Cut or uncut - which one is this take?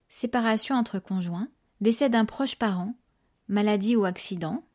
cut